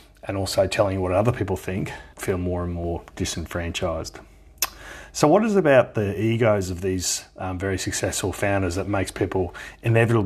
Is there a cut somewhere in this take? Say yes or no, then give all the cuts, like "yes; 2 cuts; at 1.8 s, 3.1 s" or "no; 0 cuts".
yes; 1 cut; at 2.1 s